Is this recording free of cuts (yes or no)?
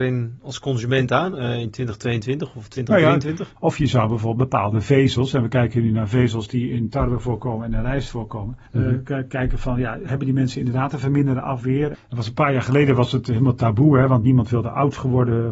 no